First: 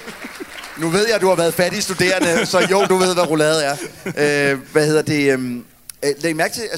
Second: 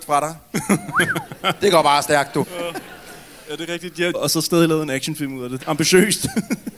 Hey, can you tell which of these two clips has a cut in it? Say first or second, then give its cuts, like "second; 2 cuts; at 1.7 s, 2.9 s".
second; 3 cuts; at 2.4 s, 4.1 s, 5.6 s